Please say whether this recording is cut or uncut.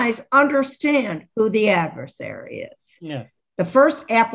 cut